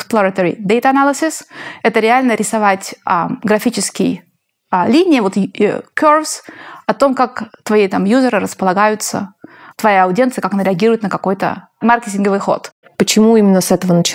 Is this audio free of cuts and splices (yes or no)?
no